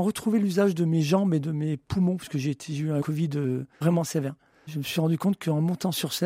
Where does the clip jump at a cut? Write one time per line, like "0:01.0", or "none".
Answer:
none